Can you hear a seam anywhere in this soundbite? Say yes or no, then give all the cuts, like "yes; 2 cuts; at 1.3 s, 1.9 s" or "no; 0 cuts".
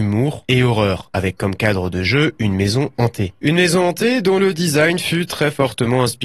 no; 0 cuts